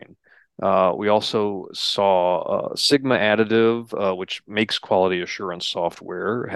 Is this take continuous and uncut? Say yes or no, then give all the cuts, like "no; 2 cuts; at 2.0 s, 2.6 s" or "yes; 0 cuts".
yes; 0 cuts